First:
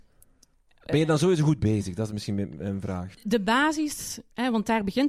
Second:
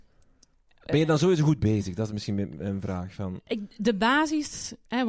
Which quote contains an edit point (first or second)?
first